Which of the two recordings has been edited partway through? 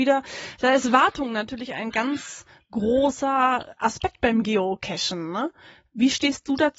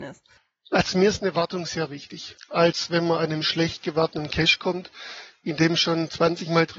second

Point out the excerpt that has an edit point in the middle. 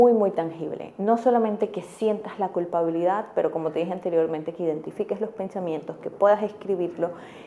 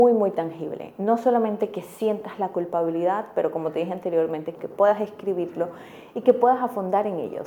second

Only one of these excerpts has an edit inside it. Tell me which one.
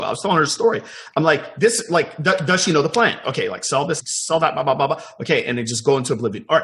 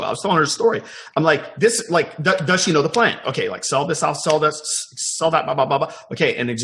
first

